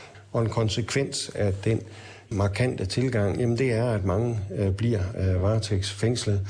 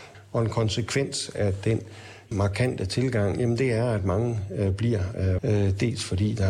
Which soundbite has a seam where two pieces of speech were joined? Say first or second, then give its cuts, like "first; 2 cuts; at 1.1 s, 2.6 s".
second; 1 cut; at 5.4 s